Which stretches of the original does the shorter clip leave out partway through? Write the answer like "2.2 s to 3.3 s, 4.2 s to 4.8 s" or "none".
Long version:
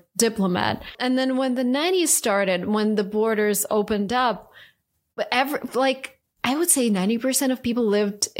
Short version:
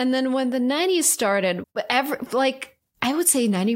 2.6 s to 5.0 s